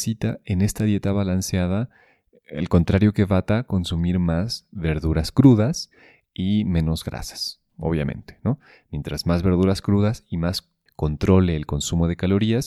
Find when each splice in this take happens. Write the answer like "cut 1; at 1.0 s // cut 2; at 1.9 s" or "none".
none